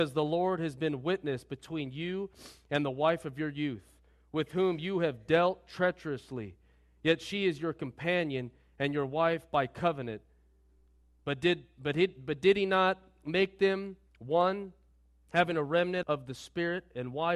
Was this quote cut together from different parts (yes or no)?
yes